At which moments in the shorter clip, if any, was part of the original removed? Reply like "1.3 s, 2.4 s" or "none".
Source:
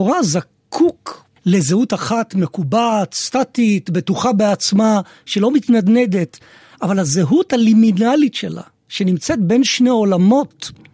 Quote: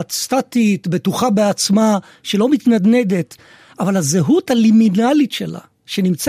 none